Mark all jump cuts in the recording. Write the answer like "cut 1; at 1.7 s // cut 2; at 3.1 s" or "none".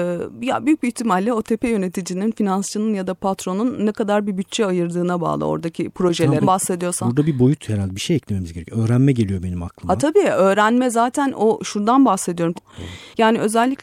cut 1; at 6.4 s // cut 2; at 12.5 s